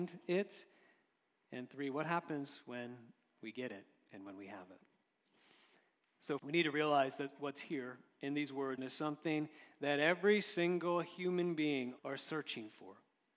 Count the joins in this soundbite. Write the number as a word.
three